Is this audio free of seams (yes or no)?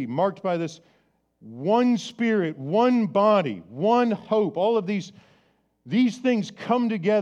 yes